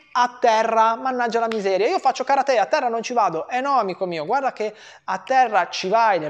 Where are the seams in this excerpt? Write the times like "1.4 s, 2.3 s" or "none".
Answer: none